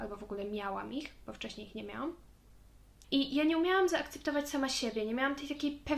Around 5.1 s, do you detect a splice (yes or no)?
no